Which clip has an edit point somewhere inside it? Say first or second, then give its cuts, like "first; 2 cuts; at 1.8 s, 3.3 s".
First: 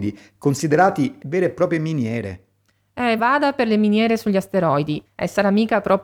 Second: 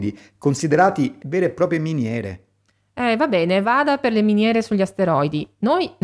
first; 2 cuts; at 3.2 s, 5.0 s